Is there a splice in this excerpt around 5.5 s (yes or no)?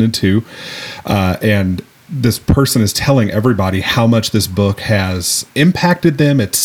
yes